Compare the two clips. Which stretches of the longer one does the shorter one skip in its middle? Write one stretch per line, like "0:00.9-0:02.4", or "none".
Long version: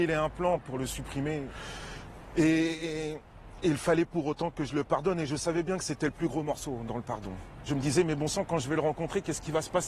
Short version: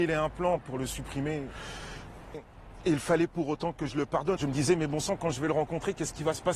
0:02.3-0:03.1
0:05.1-0:07.6